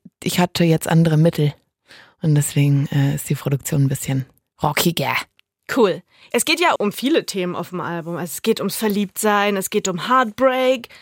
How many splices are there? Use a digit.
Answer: 1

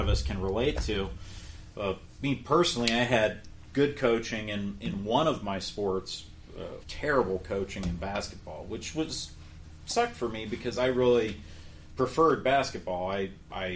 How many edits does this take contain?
1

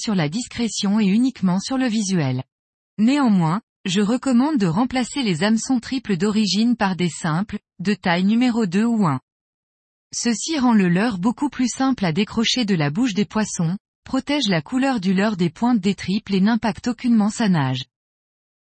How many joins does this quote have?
2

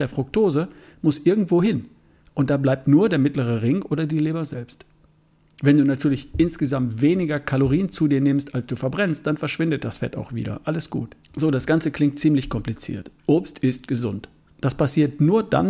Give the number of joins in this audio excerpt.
3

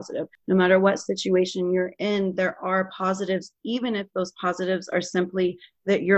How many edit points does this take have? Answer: 0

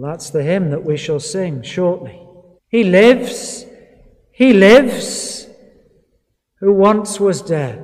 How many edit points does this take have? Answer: 1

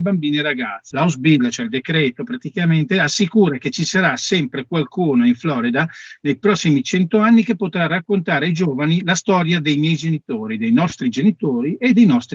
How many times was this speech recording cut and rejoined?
1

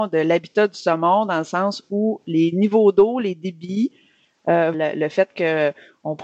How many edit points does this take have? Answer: 1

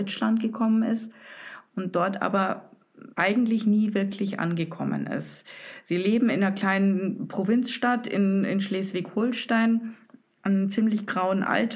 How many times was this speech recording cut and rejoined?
1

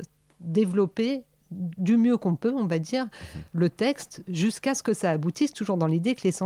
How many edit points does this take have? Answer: 0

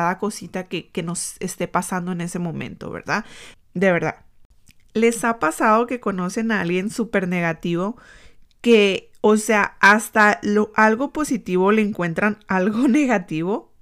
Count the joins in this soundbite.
1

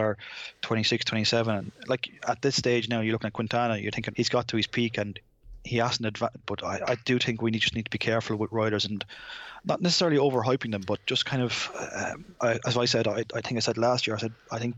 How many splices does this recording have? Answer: 3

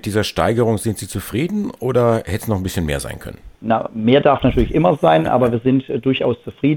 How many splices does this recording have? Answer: 1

